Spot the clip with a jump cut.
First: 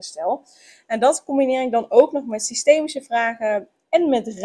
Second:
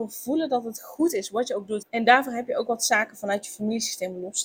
second; 1 cut; at 1.8 s

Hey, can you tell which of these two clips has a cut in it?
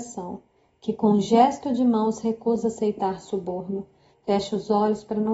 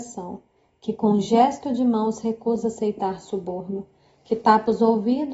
first; 1 cut; at 4.1 s

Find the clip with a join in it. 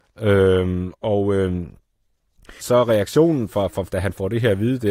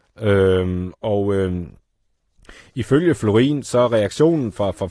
first; 2 cuts; at 2.6 s, 3.9 s

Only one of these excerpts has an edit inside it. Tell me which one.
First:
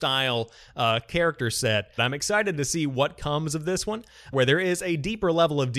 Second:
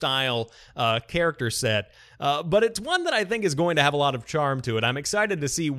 first; 2 cuts; at 2.0 s, 4.3 s

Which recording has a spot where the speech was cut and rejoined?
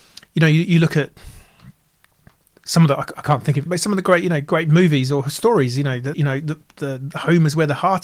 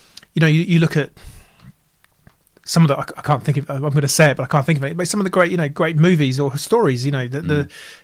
first; 2 cuts; at 3.7 s, 6.1 s

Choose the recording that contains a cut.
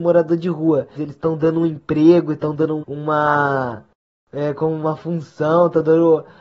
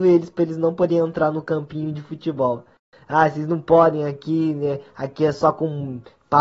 first; 2 cuts; at 1.0 s, 2.8 s

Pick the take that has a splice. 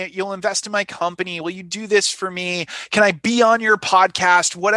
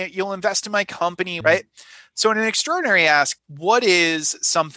second; 2 cuts; at 1.4 s, 3.4 s

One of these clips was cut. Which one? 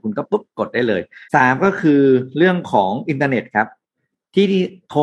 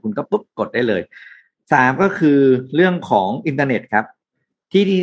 first; 1 cut; at 1.2 s

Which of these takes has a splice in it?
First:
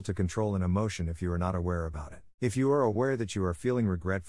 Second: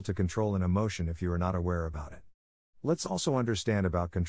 first; 1 cut; at 2.4 s

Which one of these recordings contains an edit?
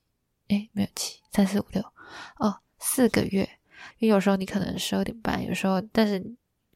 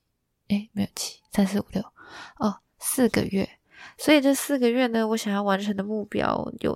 first; 1 cut; at 3.9 s

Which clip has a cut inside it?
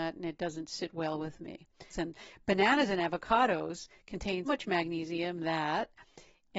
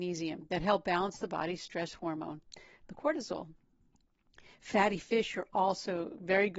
first; 2 cuts; at 1.9 s, 4.4 s

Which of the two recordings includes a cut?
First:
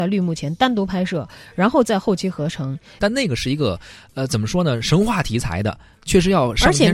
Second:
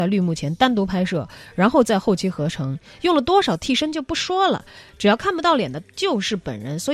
first; 1 cut; at 3.0 s

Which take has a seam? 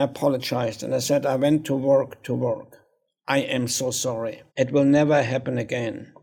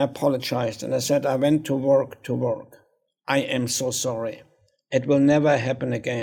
first; 1 cut; at 4.5 s

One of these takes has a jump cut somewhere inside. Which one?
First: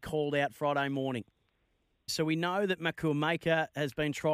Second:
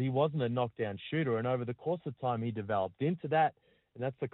first; 1 cut; at 2.1 s

